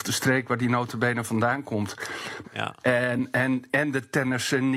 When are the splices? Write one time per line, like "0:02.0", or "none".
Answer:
0:02.4